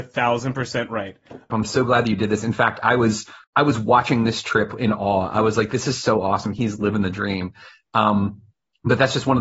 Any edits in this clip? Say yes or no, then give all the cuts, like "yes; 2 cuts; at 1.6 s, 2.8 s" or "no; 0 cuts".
yes; 2 cuts; at 1.5 s, 3.4 s